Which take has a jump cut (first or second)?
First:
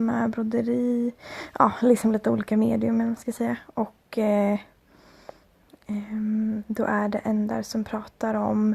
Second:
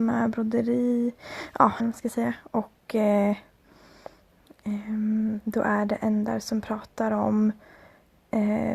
second